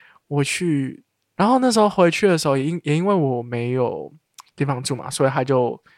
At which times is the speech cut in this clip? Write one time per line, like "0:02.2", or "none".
0:01.3